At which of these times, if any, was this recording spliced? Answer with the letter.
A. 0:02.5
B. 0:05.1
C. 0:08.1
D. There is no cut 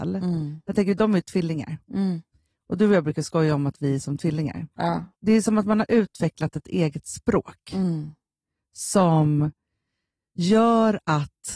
B